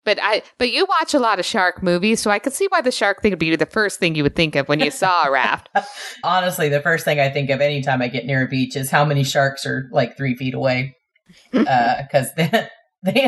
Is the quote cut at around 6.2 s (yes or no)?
yes